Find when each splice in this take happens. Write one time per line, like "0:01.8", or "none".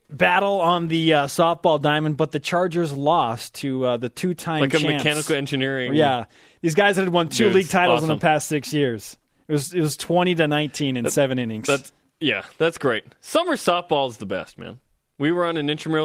none